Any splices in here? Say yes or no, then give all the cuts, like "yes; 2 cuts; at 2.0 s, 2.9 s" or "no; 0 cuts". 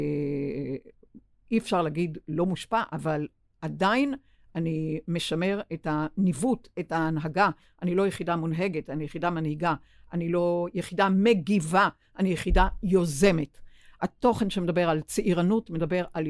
no; 0 cuts